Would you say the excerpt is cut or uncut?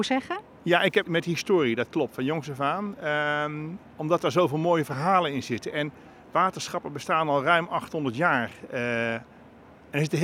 cut